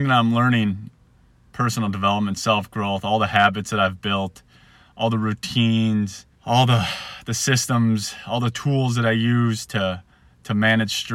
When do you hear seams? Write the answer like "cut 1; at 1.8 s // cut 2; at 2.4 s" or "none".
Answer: cut 1; at 6.3 s